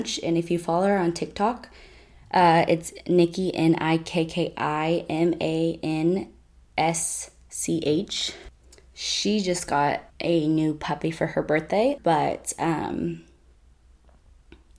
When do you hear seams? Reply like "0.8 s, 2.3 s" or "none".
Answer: 10.1 s, 12.0 s